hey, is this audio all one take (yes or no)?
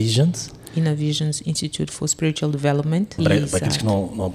no